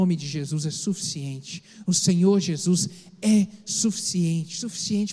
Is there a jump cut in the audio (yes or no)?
no